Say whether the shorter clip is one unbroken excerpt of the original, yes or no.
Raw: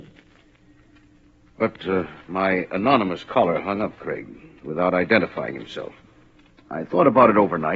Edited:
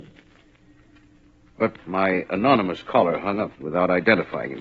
no